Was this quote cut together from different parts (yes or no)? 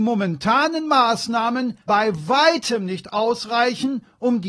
no